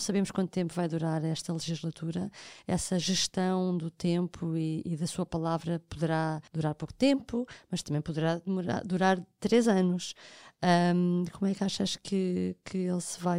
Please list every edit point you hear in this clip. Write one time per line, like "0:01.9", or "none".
0:06.5